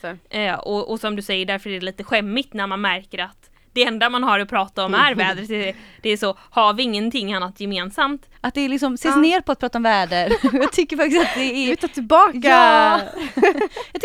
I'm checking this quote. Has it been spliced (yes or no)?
yes